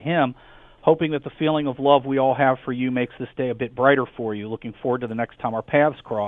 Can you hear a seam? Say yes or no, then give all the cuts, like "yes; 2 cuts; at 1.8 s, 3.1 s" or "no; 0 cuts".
no; 0 cuts